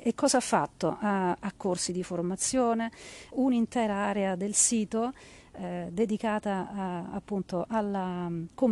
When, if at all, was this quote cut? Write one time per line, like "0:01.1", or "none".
0:01.5
0:03.3